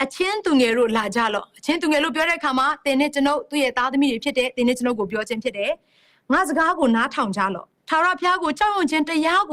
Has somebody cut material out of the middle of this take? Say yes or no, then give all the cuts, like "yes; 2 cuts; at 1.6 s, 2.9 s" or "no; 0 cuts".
yes; 1 cut; at 7.8 s